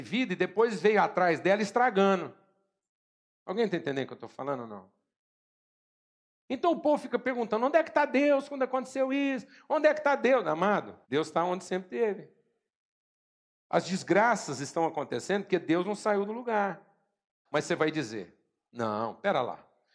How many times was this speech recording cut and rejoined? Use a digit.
2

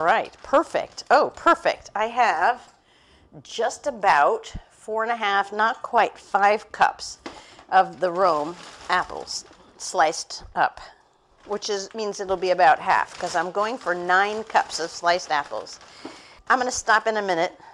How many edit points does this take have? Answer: 0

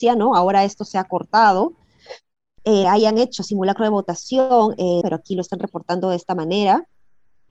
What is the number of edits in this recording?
2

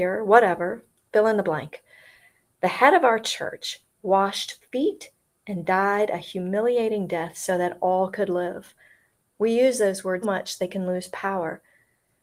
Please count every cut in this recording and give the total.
2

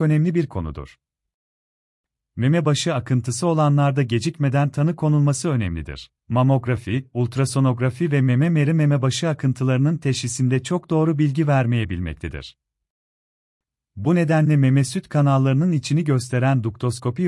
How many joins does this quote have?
1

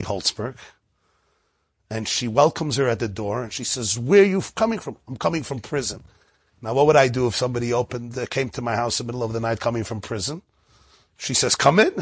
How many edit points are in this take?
1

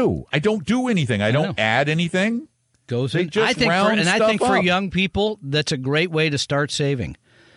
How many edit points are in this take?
1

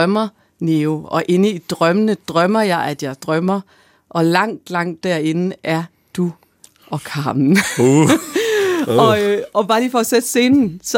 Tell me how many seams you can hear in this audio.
0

